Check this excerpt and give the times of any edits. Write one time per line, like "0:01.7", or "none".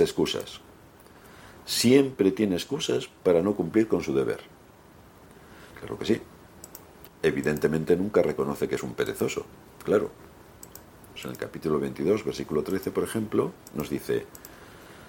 0:05.7
0:07.1
0:11.2